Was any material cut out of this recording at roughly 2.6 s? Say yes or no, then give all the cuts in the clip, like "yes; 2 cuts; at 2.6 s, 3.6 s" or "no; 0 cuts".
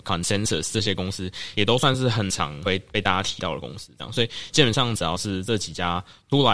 yes; 1 cut; at 2.6 s